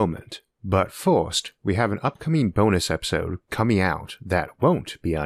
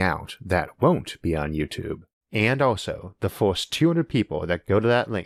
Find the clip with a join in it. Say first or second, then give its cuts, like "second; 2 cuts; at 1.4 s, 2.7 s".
second; 1 cut; at 2.2 s